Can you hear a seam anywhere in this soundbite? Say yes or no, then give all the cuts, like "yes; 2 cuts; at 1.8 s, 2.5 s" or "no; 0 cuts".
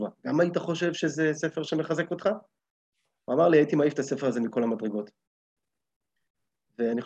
no; 0 cuts